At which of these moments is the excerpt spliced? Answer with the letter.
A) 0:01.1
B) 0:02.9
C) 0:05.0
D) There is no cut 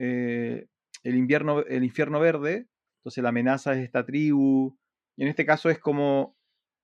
B